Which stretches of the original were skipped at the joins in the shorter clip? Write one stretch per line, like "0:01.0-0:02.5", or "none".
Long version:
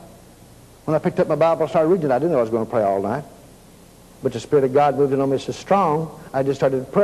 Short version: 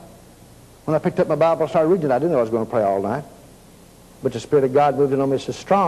none